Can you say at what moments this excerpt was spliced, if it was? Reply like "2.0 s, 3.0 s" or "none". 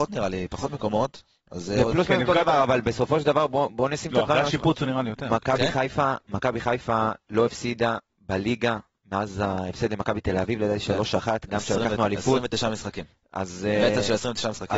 none